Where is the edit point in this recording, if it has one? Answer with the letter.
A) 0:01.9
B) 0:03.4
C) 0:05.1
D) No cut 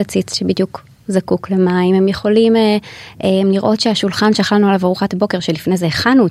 D